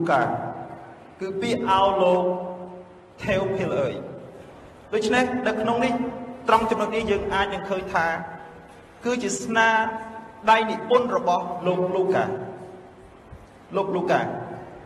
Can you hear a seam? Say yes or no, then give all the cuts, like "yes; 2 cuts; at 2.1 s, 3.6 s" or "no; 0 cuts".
no; 0 cuts